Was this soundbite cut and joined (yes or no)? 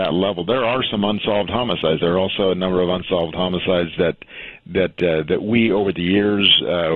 no